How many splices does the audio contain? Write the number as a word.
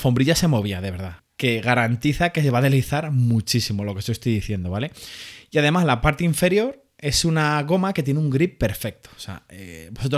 one